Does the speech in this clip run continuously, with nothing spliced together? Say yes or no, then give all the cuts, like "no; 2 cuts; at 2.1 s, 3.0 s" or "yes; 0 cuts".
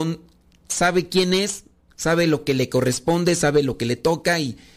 yes; 0 cuts